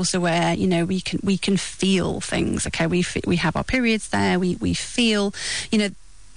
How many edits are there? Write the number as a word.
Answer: zero